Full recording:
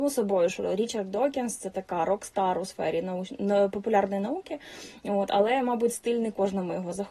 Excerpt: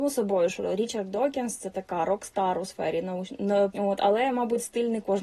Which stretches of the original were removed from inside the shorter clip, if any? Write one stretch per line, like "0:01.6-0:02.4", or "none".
0:03.7-0:05.0